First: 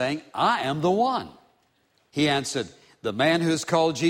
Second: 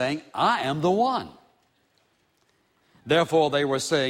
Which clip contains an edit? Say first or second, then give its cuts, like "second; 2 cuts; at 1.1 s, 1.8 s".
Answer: first; 1 cut; at 2.1 s